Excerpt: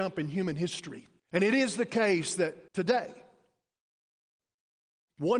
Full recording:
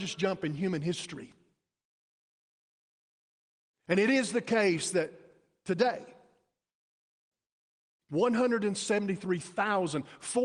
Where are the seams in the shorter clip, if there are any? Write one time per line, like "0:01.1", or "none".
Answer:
0:01.2
0:02.7

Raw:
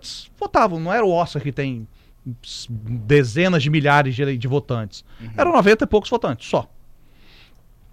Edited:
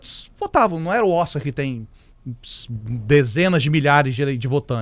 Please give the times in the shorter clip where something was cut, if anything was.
none

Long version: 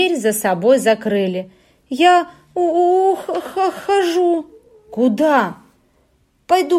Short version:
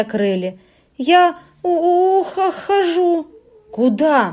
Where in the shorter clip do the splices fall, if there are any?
0:02.3

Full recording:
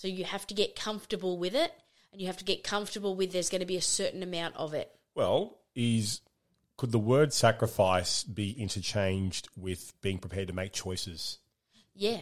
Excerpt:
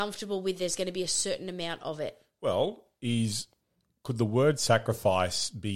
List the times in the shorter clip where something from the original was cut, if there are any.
none

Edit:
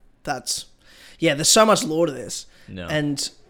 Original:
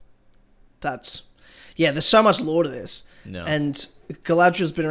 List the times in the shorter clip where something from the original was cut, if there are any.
none

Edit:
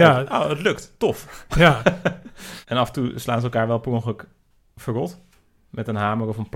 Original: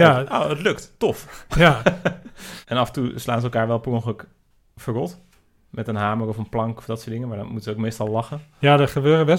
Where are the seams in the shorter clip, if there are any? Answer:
none

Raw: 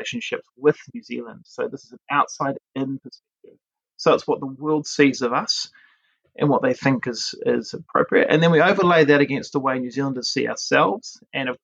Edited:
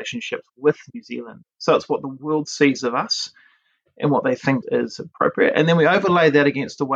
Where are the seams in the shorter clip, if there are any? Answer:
0:01.4
0:04.6

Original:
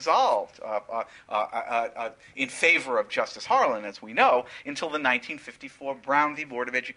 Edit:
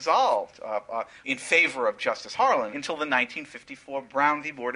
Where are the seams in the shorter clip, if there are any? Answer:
0:01.2
0:02.7

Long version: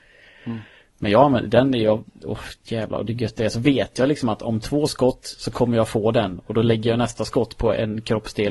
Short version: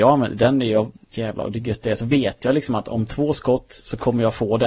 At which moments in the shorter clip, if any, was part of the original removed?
0:01.0

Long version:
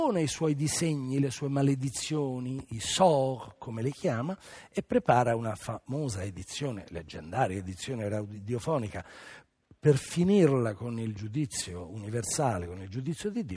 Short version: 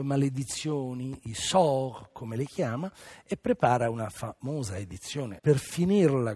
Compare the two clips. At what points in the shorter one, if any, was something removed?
0:05.4

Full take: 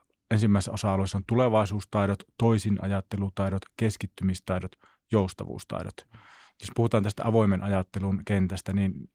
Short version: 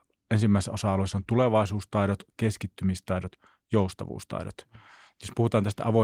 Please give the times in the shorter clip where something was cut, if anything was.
0:02.3

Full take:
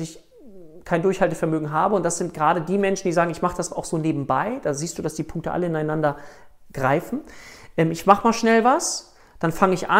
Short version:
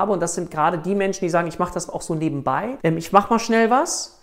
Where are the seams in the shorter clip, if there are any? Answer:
0:02.8

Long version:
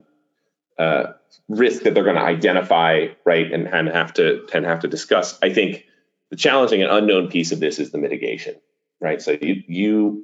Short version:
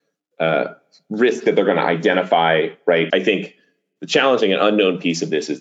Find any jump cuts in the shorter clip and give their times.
0:03.1

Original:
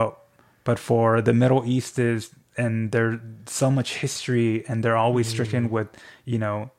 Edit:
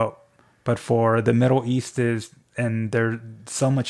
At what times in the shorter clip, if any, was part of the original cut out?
none

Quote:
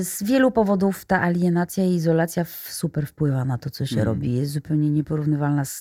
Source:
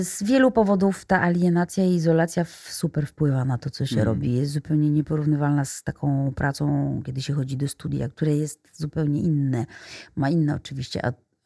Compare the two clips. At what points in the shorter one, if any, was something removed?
none

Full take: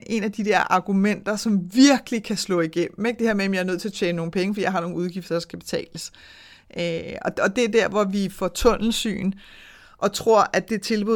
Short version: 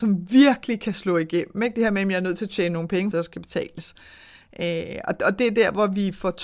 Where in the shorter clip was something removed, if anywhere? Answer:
0:03.1

